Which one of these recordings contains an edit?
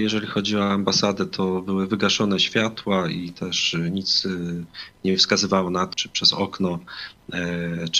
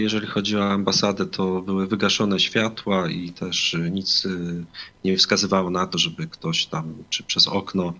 first; 1 cut; at 5.9 s

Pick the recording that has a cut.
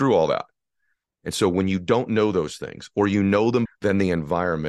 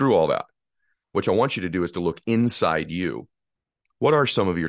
first; 2 cuts; at 1.1 s, 3.7 s

